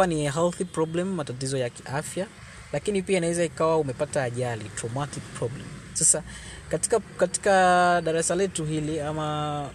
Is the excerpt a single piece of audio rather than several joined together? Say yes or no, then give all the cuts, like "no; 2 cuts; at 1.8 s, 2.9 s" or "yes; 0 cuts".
yes; 0 cuts